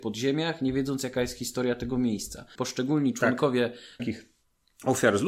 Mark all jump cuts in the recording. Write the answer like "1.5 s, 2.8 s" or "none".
2.6 s, 4.0 s